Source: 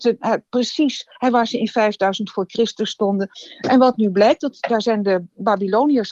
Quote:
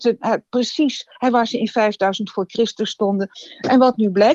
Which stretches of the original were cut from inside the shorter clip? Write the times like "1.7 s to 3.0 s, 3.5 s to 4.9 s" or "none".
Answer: none